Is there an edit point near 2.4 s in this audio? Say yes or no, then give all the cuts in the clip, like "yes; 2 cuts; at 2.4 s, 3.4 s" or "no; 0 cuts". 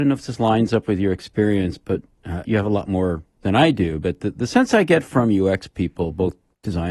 yes; 1 cut; at 2.4 s